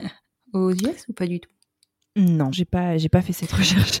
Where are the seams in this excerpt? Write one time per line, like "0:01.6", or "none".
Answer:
0:02.5